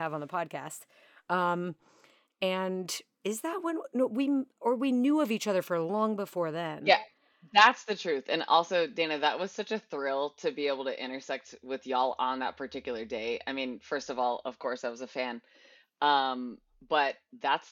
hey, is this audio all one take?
yes; 0 cuts

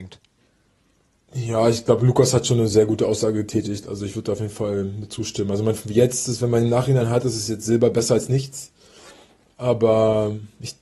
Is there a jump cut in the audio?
no; 0 cuts

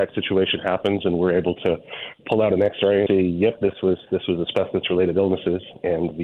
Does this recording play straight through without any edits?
no; 1 cut; at 3.1 s

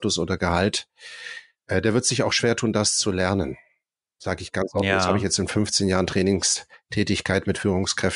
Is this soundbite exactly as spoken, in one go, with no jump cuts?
yes; 0 cuts

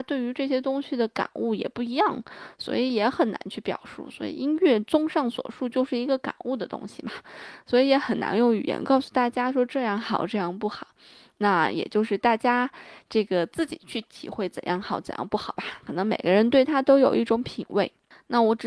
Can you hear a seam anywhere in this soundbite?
no; 0 cuts

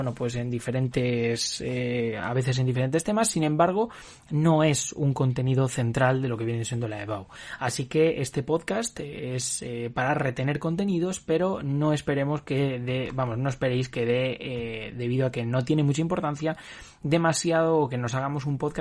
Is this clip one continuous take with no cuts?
yes; 0 cuts

